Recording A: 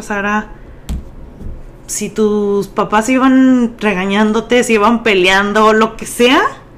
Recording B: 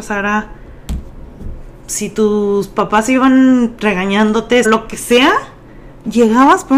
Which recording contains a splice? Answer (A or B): B